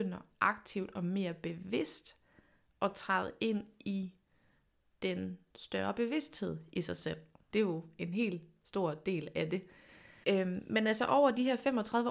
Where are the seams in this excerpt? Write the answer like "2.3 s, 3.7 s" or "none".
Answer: 7.5 s, 10.2 s